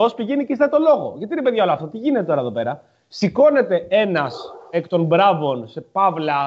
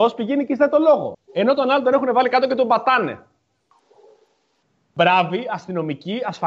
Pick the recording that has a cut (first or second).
second